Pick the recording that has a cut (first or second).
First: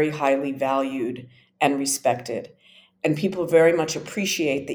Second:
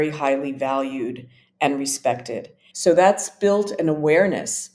second